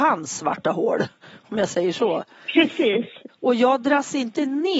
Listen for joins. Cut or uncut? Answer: cut